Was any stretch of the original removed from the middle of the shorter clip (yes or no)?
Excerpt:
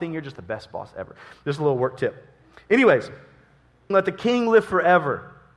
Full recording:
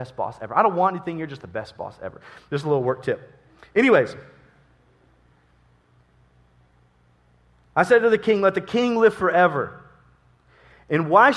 yes